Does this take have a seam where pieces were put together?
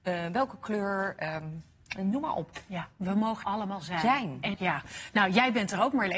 yes; 2 cuts; at 3.4 s, 4.5 s

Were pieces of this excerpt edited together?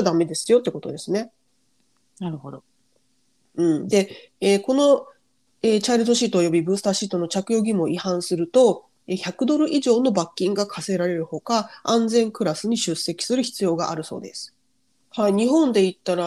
yes; 1 cut; at 15.0 s

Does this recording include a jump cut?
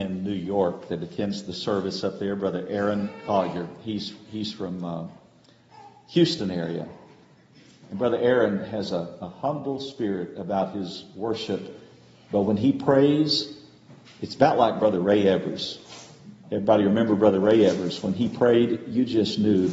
no; 0 cuts

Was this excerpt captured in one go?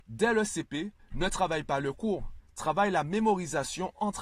yes; 0 cuts

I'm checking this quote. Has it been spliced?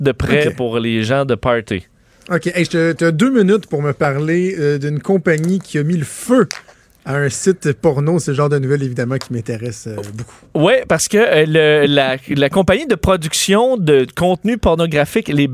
no; 0 cuts

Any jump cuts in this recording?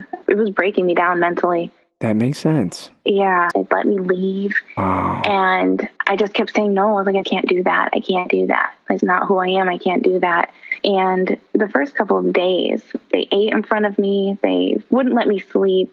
yes; 3 cuts; at 3.5 s, 7.2 s, 9.0 s

